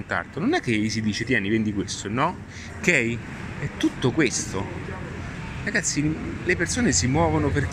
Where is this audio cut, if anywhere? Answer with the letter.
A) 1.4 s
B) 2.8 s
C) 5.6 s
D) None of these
B